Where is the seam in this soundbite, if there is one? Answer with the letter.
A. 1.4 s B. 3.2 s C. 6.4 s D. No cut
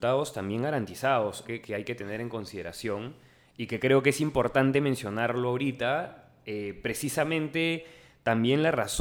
A